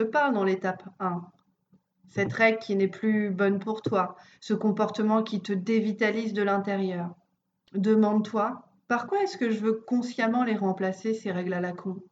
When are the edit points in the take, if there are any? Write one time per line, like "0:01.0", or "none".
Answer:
0:08.8